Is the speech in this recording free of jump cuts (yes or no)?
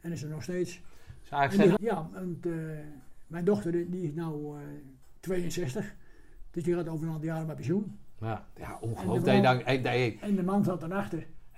no